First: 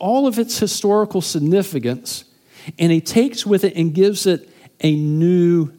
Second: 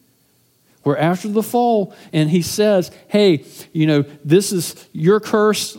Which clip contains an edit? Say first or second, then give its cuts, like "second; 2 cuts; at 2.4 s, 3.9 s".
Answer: second; 1 cut; at 2.1 s